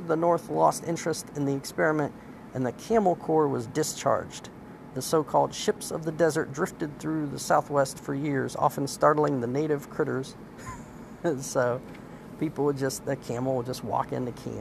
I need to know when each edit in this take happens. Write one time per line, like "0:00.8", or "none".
none